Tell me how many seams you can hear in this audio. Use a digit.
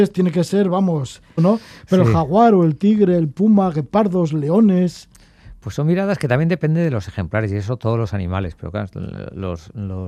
1